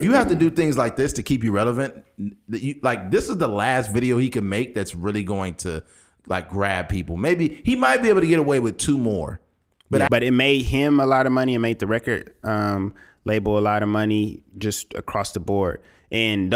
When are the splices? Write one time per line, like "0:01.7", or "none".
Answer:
0:10.1